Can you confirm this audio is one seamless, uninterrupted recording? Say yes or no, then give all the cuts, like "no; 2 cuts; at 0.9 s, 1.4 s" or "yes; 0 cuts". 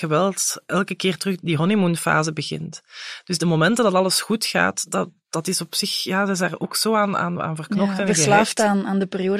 yes; 0 cuts